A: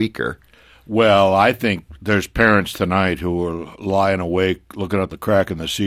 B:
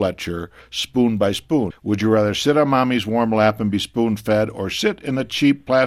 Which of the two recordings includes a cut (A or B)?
B